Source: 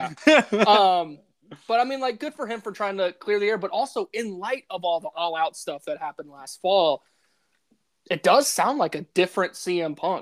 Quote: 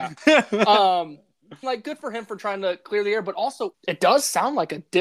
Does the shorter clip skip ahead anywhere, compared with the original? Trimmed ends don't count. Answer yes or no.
yes